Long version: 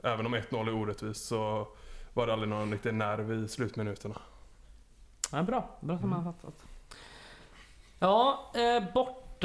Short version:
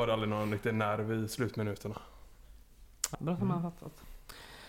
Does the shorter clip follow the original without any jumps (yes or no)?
no